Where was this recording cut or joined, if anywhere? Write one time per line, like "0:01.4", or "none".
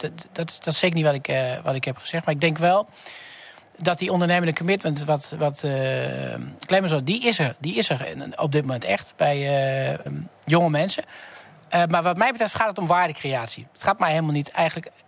0:10.1